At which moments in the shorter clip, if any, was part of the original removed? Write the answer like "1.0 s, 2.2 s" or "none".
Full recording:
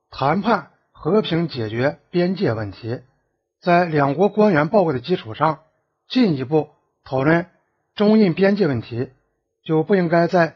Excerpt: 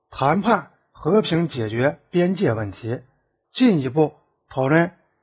3.4 s